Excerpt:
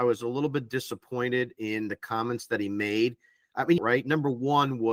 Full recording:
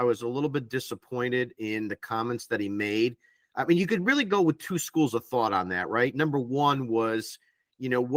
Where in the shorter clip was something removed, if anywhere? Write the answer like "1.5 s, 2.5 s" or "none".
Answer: 3.8 s